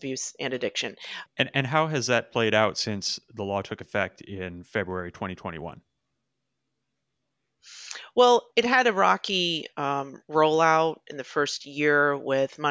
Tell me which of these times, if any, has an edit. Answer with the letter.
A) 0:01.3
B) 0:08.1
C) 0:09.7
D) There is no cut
A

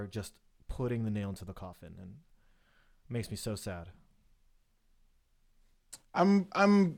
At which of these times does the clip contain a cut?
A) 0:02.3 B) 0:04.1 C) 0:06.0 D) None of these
D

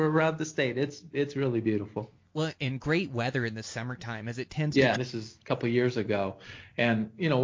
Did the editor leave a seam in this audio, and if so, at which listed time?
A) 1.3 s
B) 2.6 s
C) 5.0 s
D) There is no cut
C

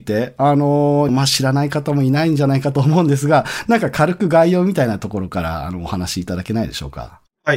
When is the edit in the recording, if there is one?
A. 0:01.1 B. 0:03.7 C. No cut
A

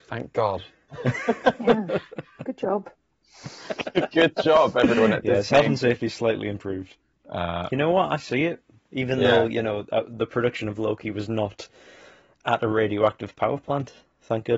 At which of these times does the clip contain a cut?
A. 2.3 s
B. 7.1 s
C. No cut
B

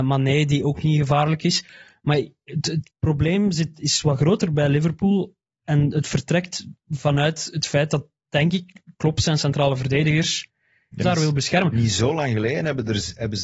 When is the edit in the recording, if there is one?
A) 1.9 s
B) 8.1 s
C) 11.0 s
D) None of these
C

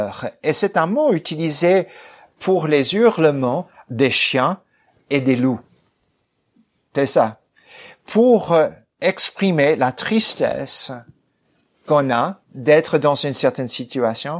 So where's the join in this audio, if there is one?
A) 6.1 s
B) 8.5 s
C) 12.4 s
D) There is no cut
C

